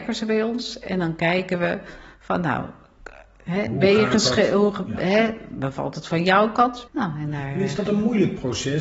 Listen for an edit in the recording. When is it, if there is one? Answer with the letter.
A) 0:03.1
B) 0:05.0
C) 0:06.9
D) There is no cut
C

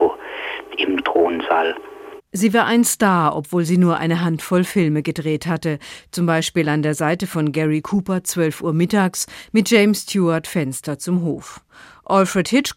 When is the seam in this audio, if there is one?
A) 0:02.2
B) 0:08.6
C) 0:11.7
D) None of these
A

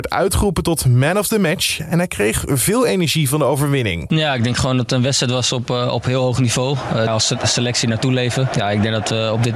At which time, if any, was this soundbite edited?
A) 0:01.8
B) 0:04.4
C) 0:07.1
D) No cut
C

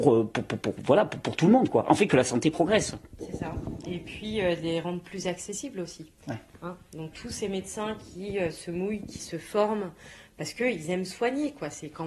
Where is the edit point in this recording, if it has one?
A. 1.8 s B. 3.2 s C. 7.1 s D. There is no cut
C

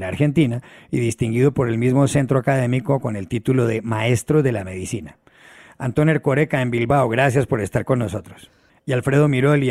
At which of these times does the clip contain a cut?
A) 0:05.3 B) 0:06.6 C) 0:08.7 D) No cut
C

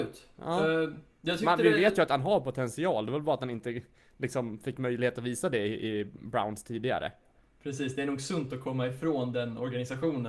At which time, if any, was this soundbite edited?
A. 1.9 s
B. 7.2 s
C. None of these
C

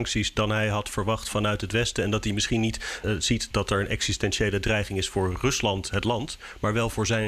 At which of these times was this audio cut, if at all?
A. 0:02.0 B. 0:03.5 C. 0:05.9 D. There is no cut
B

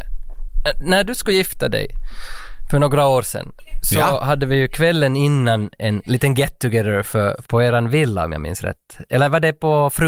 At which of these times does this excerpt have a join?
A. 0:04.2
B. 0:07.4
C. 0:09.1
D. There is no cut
B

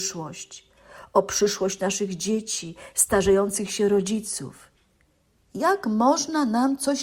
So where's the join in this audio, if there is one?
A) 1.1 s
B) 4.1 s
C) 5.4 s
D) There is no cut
C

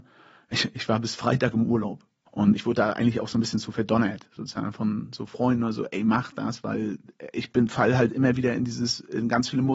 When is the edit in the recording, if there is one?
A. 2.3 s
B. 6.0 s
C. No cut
A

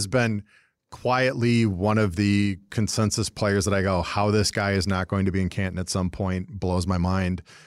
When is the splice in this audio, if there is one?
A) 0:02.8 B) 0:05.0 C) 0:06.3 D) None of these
D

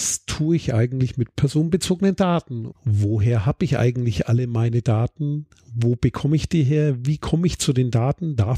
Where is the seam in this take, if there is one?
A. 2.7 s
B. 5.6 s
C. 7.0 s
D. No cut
A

